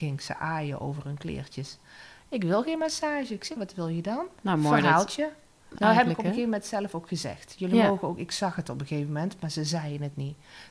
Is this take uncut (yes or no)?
no